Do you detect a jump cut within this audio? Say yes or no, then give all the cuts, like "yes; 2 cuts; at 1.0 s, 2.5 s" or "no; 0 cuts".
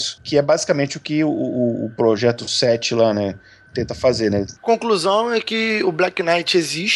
yes; 1 cut; at 4.6 s